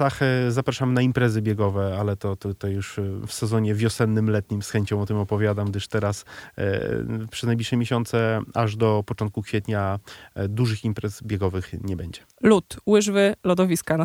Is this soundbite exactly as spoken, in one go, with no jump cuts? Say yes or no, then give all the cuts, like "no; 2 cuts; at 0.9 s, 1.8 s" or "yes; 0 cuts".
yes; 0 cuts